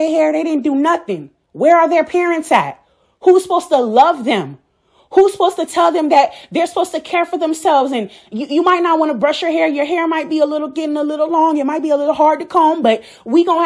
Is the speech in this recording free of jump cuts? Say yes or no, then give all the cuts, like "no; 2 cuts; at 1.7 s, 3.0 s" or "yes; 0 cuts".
yes; 0 cuts